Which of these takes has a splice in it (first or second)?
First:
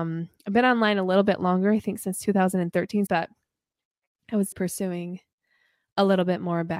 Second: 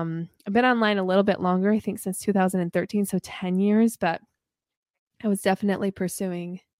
first